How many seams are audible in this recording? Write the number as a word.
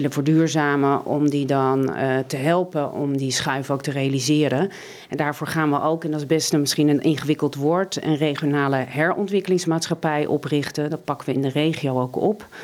two